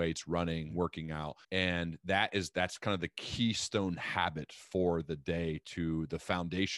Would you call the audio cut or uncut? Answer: cut